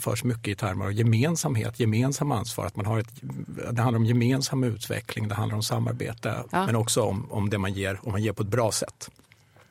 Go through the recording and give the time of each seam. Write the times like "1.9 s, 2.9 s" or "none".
6.5 s

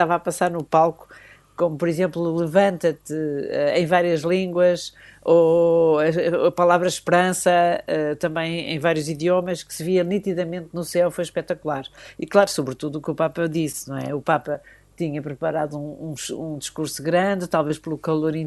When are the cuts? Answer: none

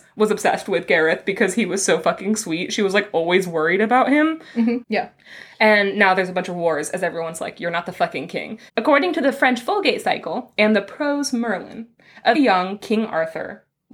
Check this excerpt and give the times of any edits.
4.8 s, 8.7 s, 12.3 s

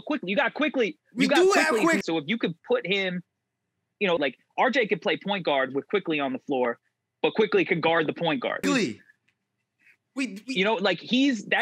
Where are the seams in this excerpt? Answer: 2.0 s, 4.2 s, 8.6 s

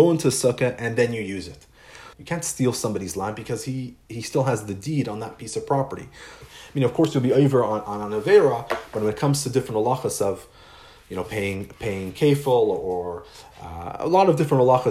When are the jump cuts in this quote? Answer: 2.1 s, 6.4 s

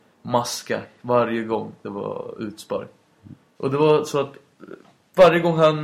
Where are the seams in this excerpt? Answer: 3.5 s

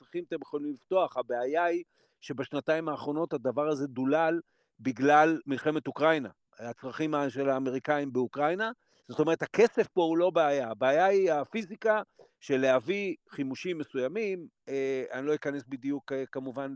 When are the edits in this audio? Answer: 9.0 s

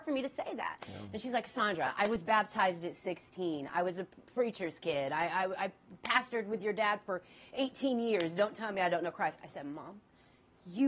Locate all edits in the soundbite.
none

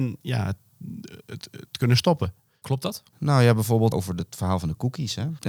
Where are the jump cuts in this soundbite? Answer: 2.6 s, 3.9 s

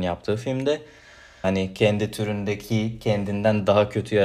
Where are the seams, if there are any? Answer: 1.4 s

